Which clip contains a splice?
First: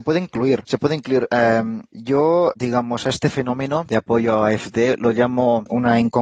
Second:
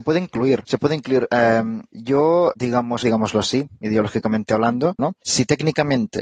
second; 2 cuts; at 3.0 s, 5.0 s

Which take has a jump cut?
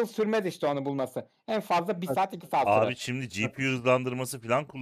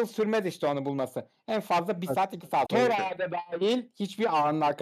second; 1 cut; at 2.6 s

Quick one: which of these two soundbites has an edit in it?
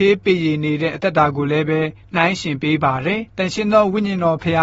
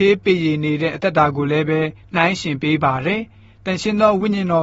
first; 1 cut; at 3.3 s

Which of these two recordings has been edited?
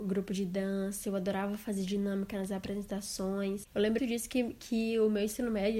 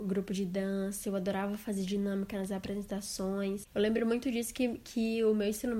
first; 1 cut; at 4.0 s

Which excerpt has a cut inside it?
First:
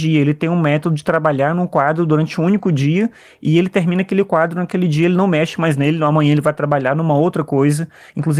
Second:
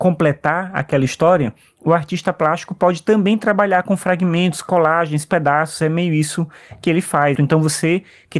second; 1 cut; at 7.4 s

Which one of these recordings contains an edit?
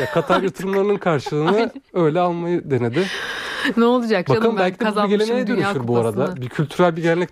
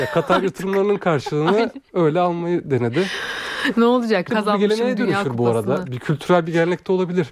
second; 1 cut; at 4.3 s

